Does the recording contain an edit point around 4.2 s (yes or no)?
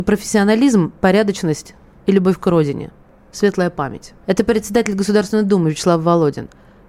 yes